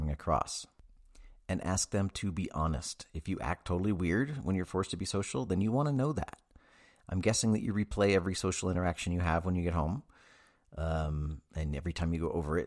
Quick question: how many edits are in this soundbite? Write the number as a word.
zero